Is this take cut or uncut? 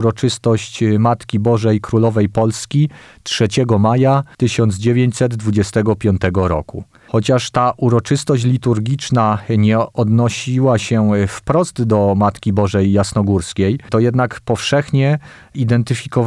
uncut